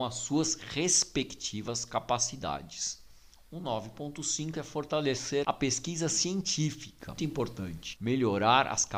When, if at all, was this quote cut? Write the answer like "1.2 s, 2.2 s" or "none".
7.2 s